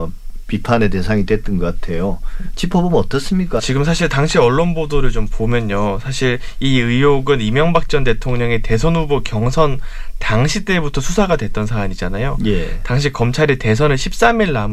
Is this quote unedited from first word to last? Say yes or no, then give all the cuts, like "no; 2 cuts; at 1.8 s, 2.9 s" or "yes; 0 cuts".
no; 1 cut; at 3.6 s